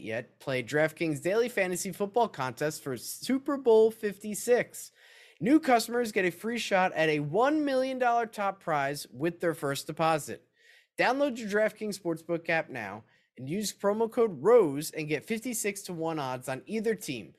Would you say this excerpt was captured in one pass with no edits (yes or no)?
yes